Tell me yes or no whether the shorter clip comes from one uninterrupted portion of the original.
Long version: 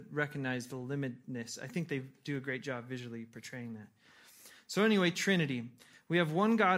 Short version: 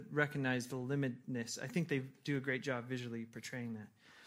yes